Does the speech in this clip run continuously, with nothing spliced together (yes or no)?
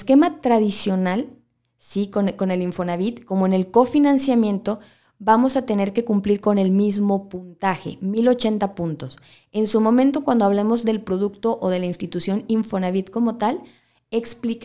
yes